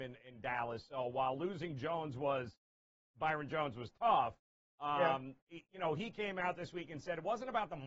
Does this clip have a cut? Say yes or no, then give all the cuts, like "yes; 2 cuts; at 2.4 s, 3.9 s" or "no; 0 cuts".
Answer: no; 0 cuts